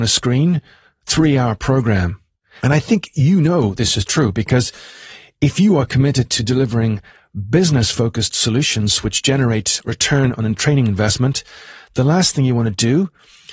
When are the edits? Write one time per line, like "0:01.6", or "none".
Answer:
0:02.6